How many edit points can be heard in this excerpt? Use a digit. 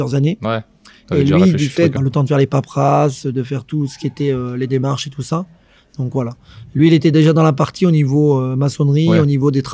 1